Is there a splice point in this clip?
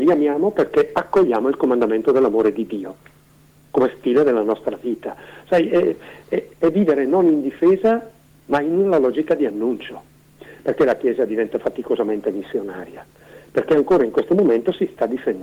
no; 0 cuts

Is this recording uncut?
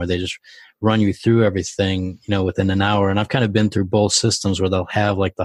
yes; 0 cuts

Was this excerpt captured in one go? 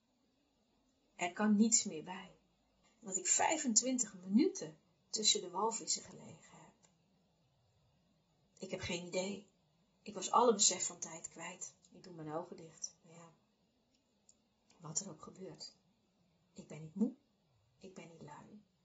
no; 2 cuts; at 2.8 s, 11.8 s

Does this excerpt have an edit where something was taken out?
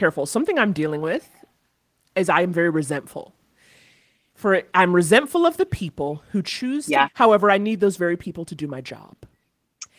yes; 1 cut; at 7.0 s

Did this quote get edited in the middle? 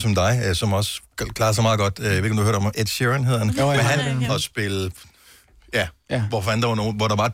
yes; 1 cut; at 4.3 s

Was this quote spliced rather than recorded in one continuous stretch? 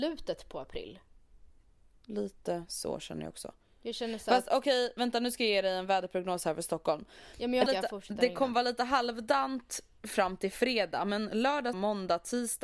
yes; 2 cuts; at 7.7 s, 11.7 s

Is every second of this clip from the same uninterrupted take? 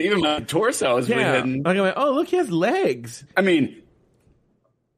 no; 2 cuts; at 1.1 s, 3.3 s

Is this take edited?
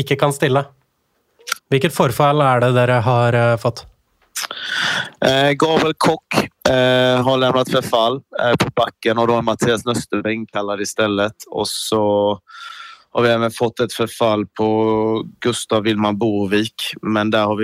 yes; 1 cut; at 1.6 s

